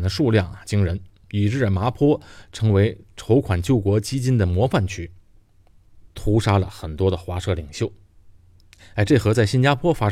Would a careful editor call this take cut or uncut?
cut